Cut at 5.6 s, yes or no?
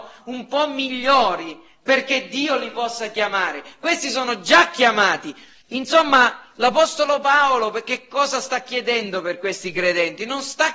yes